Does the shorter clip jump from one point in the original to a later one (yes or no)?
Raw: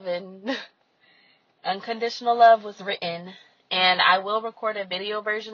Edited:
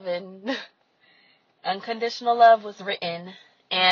no